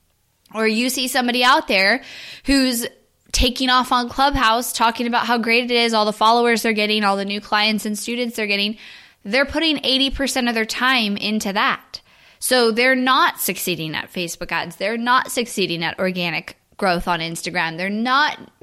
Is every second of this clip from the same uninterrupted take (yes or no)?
yes